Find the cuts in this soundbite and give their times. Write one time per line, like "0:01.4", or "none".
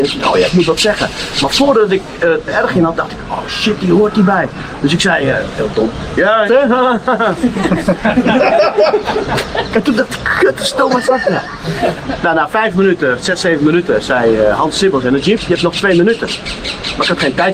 0:06.5